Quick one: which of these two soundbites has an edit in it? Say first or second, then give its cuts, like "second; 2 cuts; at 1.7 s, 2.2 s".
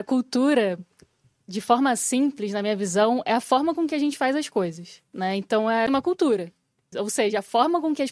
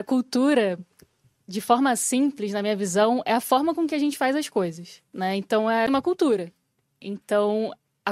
first; 1 cut; at 6.9 s